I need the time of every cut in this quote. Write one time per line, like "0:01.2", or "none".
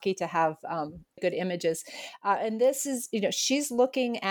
0:01.2